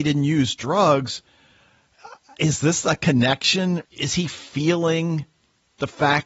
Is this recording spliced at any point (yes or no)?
yes